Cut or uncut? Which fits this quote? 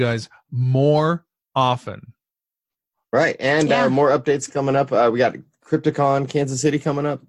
uncut